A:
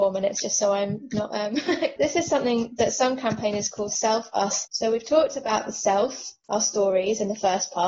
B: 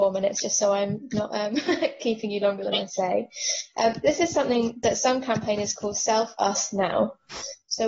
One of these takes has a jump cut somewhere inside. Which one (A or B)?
A